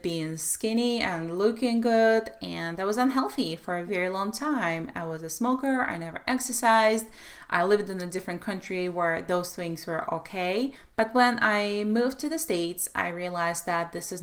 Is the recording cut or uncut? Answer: cut